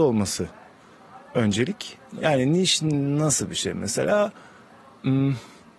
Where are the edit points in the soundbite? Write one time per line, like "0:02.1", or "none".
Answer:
0:02.2